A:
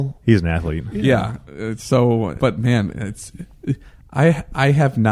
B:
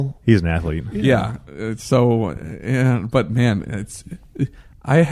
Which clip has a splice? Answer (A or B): A